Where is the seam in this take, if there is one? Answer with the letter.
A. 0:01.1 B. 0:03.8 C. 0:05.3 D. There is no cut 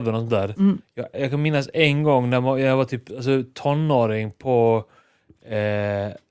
A